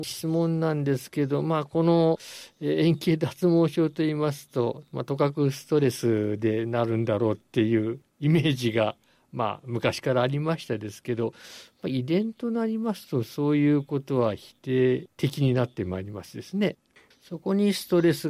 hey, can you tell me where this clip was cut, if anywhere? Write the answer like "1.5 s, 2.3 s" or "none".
17.1 s